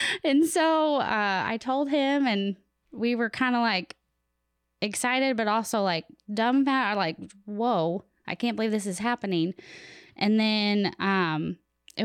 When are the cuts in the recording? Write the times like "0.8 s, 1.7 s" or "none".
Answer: none